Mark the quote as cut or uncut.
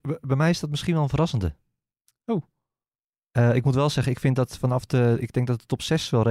uncut